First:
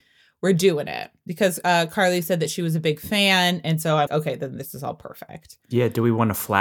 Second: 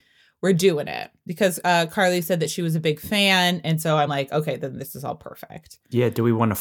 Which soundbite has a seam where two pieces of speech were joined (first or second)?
first